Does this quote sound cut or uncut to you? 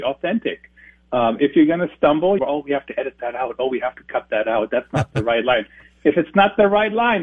cut